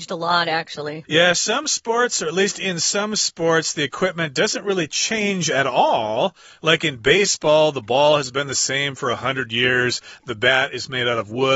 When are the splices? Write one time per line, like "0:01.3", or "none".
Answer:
0:01.0